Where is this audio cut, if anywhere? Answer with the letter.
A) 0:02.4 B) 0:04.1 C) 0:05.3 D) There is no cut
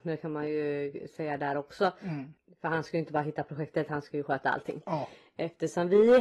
D